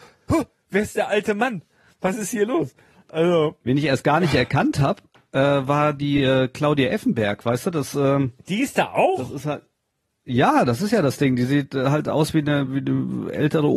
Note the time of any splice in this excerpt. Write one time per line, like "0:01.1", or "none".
none